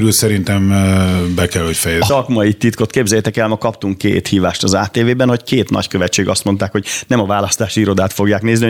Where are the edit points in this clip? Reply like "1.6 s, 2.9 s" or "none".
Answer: 2.1 s